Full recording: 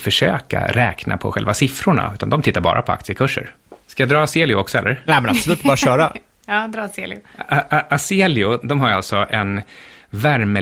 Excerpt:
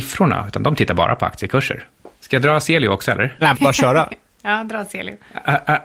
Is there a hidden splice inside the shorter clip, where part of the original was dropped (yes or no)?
yes